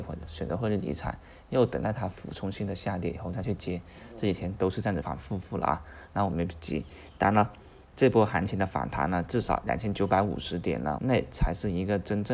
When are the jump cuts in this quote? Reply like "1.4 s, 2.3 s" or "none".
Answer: 5.0 s, 11.0 s

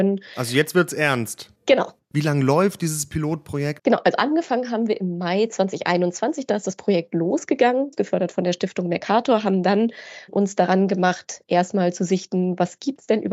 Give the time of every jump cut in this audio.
2.1 s, 3.8 s

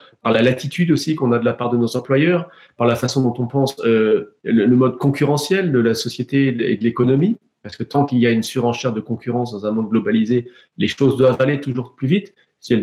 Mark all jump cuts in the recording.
none

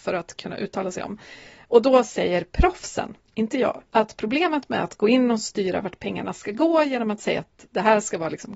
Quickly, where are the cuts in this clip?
3.9 s

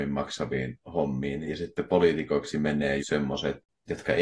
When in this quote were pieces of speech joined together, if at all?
3.0 s

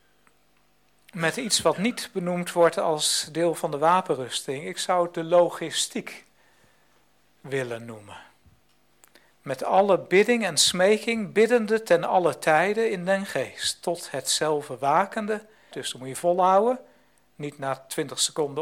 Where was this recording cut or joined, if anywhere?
15.7 s

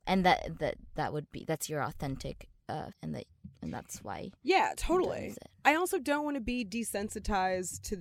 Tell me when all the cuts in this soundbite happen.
2.9 s

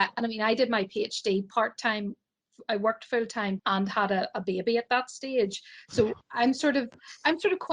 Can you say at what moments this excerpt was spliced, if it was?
3.6 s

